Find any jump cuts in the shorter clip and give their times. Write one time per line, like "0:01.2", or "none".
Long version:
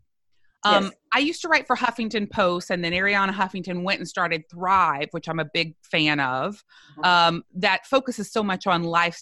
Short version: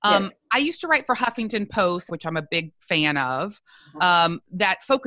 0:02.1

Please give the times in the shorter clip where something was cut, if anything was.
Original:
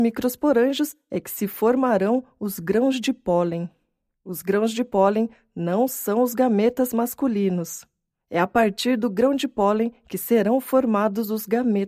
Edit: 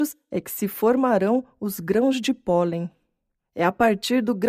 0:03.4

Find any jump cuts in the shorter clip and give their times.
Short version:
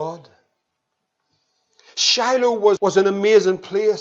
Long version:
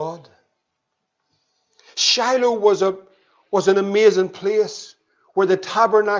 0:02.8

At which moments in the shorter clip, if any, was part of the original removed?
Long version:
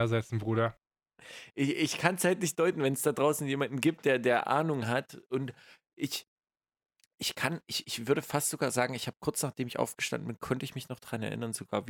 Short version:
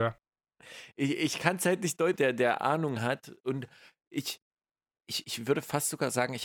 0:02.1
0:05.0

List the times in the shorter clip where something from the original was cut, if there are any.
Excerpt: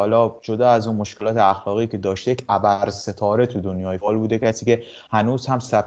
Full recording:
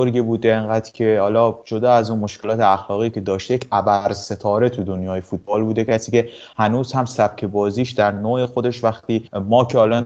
0:04.0

